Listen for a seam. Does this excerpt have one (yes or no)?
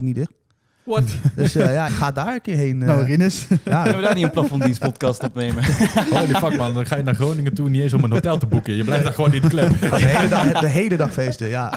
yes